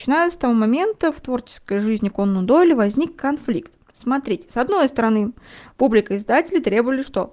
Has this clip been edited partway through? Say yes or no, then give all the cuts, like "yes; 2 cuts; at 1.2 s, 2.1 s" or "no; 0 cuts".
no; 0 cuts